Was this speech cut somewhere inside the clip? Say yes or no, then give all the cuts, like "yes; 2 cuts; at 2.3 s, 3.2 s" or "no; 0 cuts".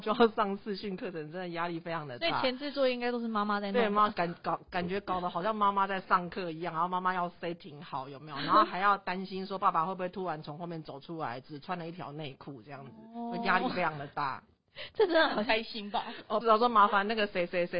yes; 1 cut; at 16.4 s